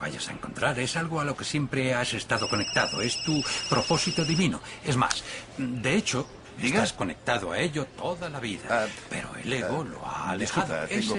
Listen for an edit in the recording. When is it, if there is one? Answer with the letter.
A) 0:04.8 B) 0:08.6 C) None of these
C